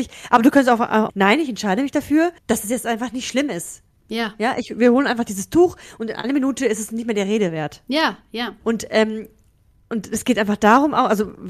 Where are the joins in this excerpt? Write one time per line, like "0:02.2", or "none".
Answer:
0:01.1
0:02.4
0:08.6